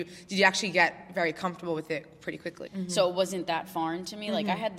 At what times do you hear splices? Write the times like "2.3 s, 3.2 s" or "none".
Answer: 2.7 s